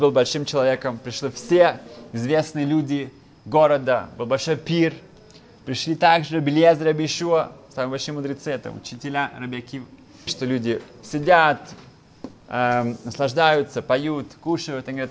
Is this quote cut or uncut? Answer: cut